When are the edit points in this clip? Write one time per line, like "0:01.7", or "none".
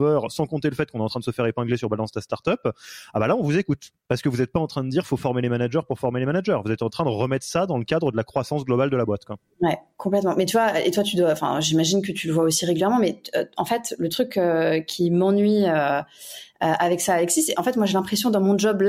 none